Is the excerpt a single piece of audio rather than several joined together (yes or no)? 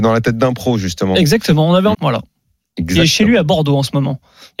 no